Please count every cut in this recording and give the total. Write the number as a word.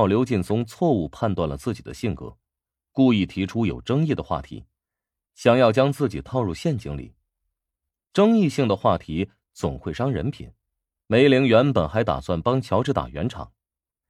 two